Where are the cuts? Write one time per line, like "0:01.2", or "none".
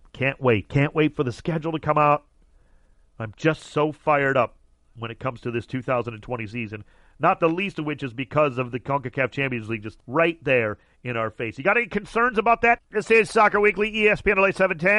0:10.0
0:12.8